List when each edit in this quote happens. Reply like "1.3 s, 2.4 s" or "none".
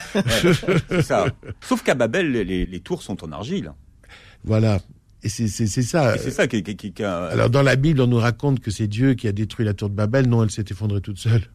1.6 s, 2.6 s